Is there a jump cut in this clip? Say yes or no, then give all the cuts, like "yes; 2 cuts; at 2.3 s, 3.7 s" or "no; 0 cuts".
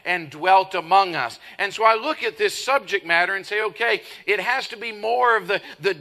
no; 0 cuts